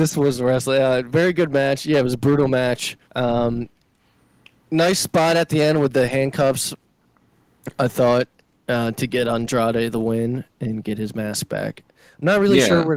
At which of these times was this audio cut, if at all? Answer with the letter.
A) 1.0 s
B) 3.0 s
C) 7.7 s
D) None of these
B